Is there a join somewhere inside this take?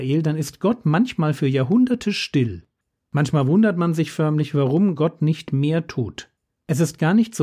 no; 0 cuts

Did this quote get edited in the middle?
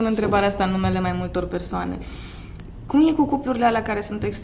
no; 0 cuts

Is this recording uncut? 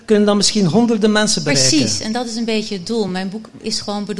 yes; 0 cuts

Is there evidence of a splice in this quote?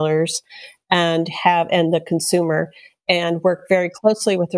no; 0 cuts

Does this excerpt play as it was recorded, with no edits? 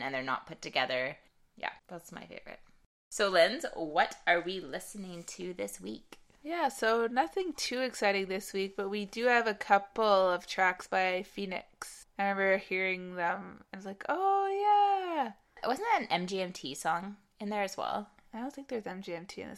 yes; 0 cuts

